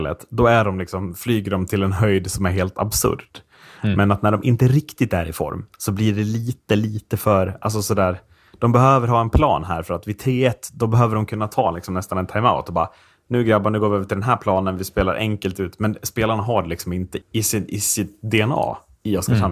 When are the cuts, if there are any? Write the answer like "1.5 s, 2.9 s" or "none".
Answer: 17.2 s